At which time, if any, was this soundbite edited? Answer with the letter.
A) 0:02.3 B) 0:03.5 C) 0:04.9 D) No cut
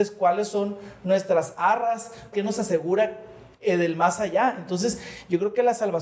A